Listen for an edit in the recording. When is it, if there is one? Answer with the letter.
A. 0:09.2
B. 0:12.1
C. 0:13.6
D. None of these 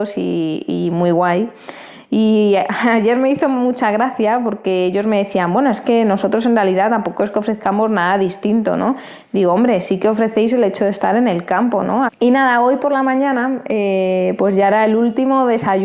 B